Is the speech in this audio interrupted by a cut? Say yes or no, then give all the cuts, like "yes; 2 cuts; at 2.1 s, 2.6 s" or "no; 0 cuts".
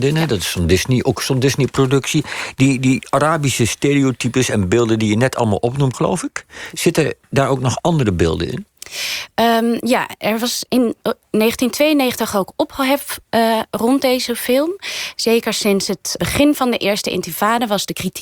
yes; 3 cuts; at 5.9 s, 15.1 s, 16.2 s